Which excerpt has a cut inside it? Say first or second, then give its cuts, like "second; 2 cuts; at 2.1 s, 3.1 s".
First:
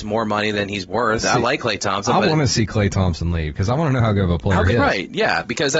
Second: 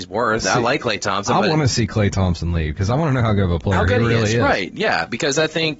first; 1 cut; at 4.7 s